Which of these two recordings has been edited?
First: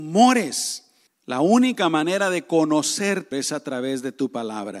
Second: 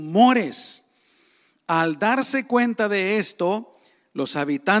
first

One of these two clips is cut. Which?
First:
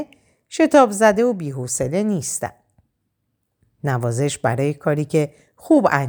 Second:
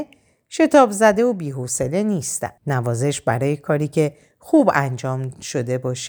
second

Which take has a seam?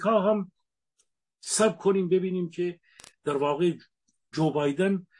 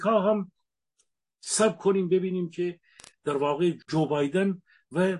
second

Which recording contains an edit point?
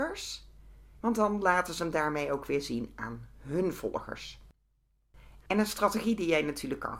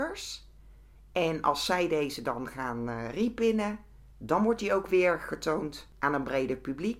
first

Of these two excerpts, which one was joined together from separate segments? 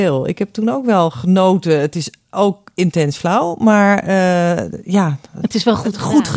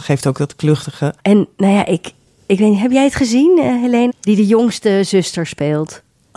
second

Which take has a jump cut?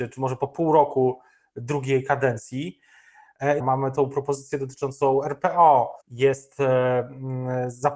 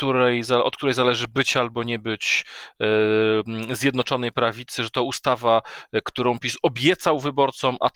first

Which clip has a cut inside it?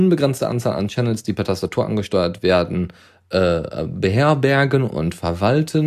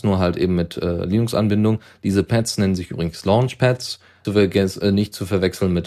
second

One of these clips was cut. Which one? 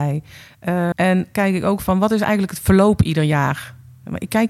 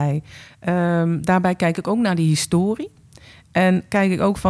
first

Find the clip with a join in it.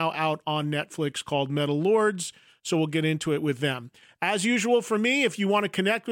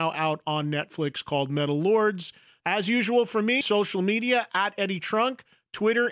second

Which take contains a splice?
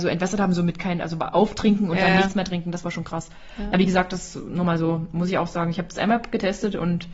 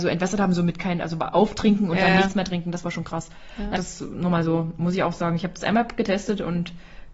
second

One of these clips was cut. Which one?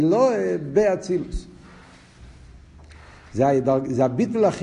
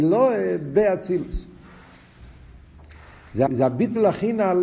second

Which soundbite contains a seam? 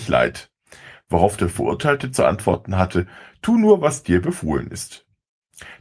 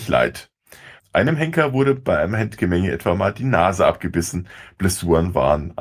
second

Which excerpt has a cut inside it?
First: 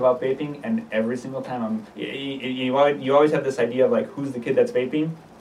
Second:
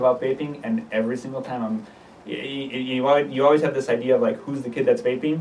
first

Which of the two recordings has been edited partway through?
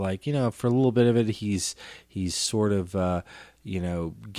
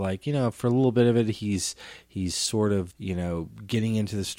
second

